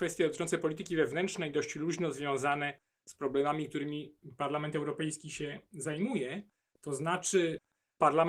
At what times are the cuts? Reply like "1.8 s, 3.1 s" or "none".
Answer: 6.7 s